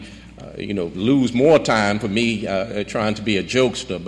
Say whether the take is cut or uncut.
uncut